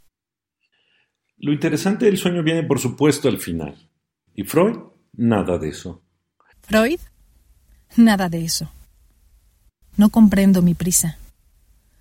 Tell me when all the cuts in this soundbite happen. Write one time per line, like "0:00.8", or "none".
0:04.3
0:06.5
0:09.8